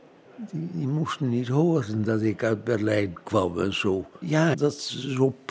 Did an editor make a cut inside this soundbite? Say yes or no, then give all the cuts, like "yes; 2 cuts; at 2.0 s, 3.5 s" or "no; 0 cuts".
yes; 1 cut; at 4.5 s